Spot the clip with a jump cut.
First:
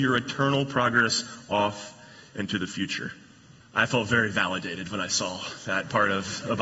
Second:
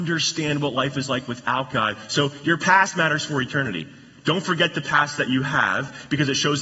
first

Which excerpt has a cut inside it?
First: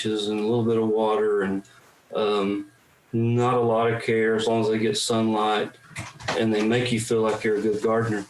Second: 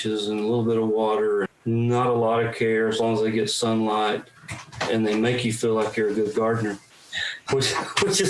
second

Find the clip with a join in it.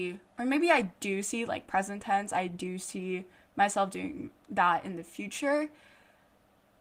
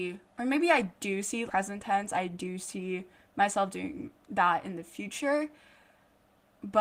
second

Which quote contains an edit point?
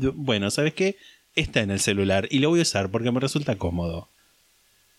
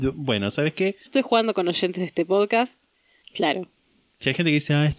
second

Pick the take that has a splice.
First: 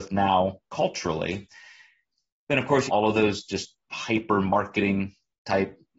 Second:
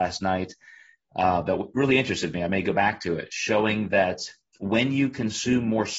first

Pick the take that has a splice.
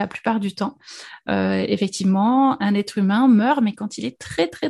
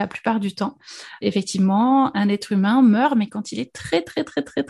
second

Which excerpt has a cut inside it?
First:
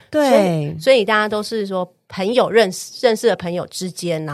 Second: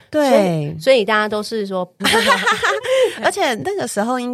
second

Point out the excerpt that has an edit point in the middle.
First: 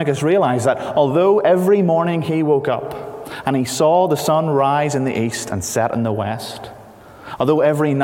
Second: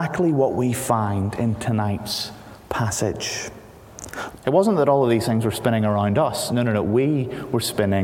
second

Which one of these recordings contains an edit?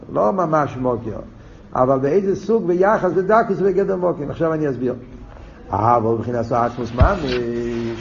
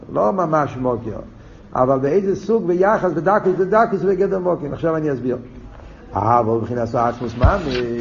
first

